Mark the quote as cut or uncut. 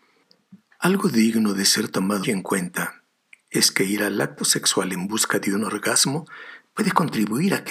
cut